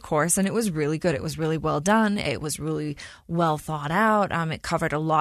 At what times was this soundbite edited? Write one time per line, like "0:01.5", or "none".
none